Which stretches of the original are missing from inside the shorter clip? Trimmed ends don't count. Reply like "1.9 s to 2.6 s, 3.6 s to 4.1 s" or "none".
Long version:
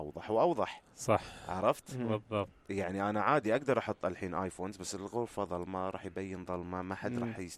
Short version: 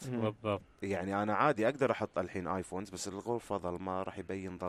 none